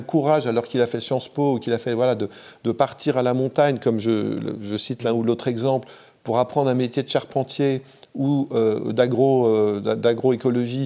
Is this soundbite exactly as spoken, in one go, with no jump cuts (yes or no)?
yes